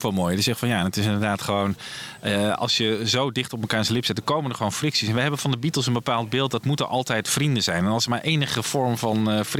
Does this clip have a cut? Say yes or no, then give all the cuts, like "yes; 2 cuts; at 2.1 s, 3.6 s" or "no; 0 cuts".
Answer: no; 0 cuts